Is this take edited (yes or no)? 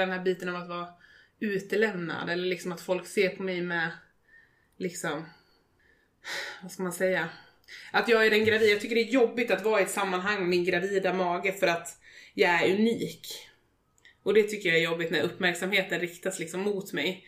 no